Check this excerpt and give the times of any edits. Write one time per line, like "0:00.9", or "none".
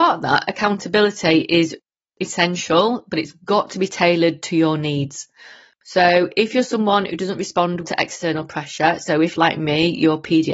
0:07.8